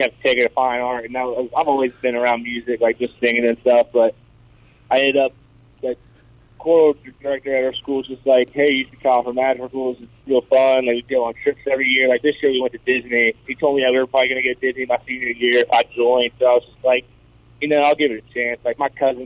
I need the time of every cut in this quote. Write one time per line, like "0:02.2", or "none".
0:13.5
0:16.3